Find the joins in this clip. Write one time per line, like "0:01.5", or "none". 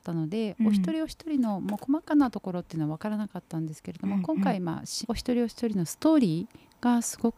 0:05.0